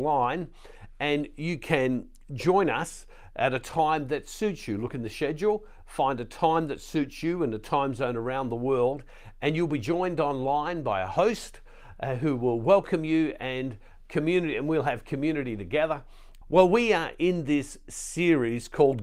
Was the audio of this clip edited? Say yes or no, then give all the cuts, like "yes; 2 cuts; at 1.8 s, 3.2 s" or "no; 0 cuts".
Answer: yes; 1 cut; at 16.4 s